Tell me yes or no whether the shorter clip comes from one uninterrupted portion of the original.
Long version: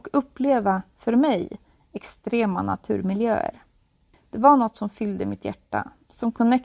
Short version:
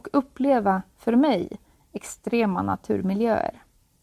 yes